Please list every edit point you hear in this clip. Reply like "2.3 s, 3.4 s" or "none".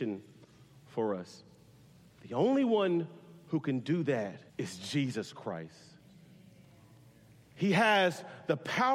2.1 s, 4.5 s